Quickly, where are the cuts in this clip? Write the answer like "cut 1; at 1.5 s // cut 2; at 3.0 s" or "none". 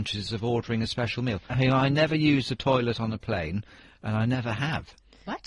cut 1; at 1.5 s